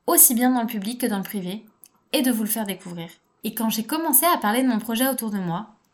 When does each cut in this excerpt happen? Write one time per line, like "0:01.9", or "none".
0:03.4